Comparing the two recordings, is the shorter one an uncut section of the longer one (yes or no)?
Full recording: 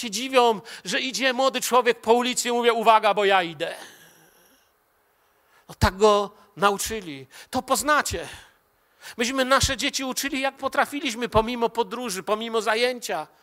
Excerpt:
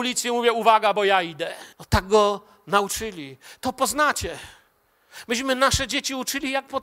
no